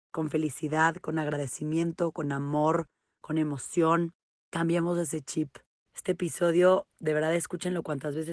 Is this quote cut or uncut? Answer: cut